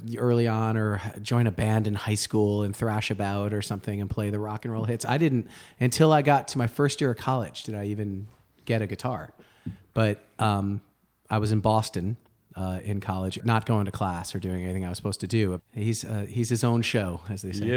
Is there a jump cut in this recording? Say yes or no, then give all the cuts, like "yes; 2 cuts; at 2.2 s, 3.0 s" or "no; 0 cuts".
yes; 2 cuts; at 13.4 s, 15.6 s